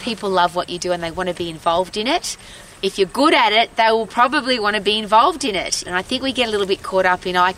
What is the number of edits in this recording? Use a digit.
1